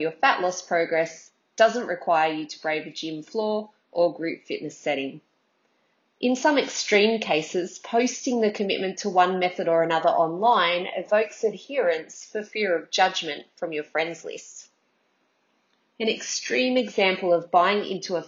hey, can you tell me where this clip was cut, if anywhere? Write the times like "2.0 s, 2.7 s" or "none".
6.0 s